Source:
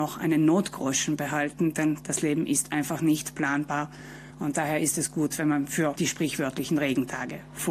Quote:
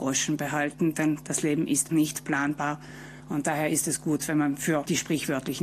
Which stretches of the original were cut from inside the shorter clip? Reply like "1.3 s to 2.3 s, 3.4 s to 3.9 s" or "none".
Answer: 2.7 s to 3.0 s